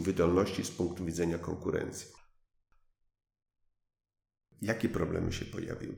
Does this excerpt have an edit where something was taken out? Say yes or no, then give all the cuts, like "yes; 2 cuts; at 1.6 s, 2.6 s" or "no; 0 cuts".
no; 0 cuts